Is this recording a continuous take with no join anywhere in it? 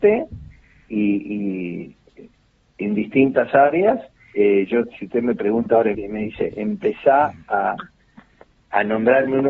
no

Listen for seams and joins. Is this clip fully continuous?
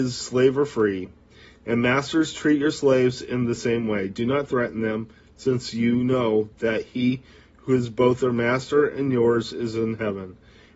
yes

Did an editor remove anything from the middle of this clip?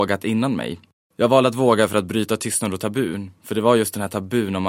no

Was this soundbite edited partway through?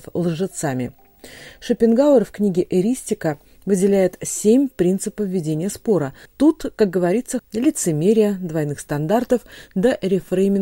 yes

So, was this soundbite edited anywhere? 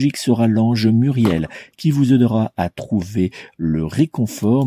no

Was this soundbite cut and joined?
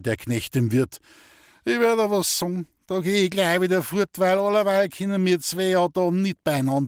no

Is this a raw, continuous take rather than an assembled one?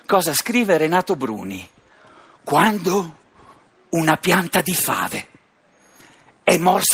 yes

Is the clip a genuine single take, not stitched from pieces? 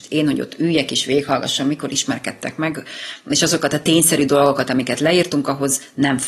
yes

